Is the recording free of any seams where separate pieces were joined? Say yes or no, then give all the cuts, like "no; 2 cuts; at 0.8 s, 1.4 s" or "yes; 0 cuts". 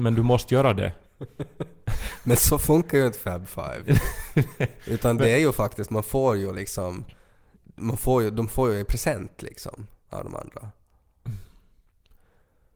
yes; 0 cuts